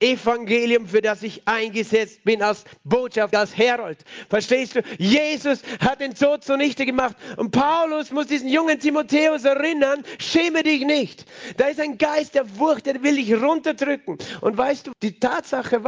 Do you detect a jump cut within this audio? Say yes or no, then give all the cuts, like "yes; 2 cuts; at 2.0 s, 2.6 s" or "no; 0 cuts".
yes; 2 cuts; at 3.3 s, 14.9 s